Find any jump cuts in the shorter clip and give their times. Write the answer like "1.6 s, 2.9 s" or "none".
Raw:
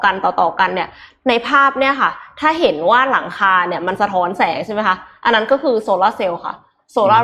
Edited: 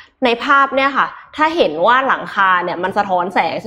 none